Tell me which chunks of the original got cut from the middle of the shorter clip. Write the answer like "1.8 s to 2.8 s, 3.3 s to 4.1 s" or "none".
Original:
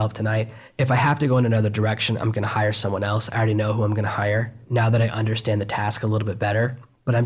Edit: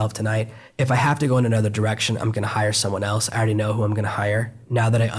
none